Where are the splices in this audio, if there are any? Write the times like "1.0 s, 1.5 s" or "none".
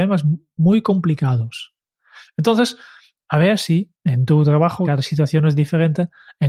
4.8 s